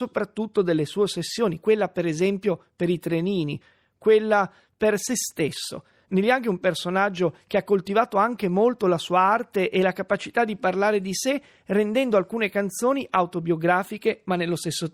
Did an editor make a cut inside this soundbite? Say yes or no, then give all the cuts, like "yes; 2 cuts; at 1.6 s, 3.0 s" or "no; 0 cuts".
no; 0 cuts